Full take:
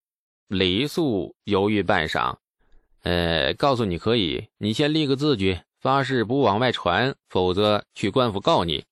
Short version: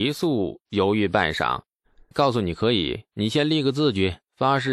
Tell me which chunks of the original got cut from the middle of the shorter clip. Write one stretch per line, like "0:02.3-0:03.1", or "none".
0:02.9-0:03.6